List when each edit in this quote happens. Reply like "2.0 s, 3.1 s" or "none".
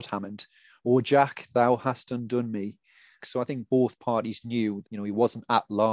3.2 s, 4.8 s